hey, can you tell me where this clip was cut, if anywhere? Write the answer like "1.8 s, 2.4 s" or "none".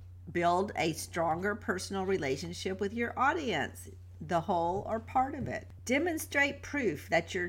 5.8 s